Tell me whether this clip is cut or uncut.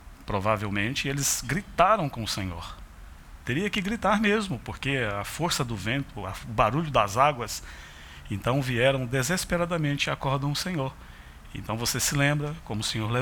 cut